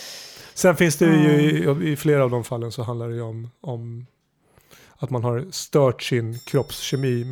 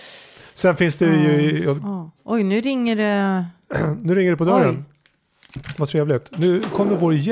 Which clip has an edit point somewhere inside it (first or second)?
second